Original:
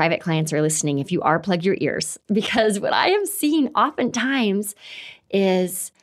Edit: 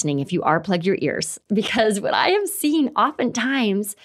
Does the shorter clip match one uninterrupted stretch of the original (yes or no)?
yes